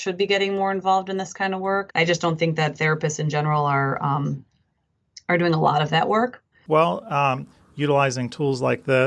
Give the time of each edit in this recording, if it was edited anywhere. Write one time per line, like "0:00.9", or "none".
0:01.9
0:06.5